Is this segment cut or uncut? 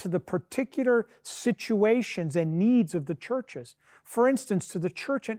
uncut